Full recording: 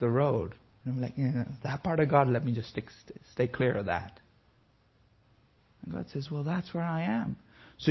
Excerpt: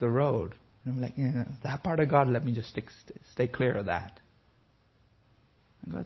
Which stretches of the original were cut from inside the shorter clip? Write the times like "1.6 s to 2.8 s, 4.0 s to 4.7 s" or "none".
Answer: none